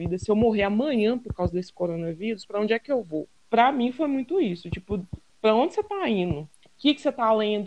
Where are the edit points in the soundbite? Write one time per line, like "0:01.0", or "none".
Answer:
0:03.4
0:05.3
0:06.6